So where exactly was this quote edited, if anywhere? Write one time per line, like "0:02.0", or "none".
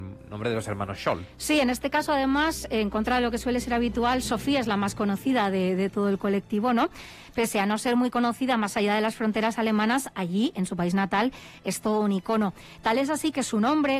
none